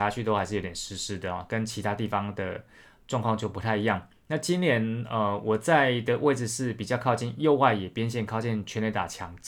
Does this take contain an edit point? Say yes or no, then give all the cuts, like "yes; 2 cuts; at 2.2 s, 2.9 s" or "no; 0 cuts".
no; 0 cuts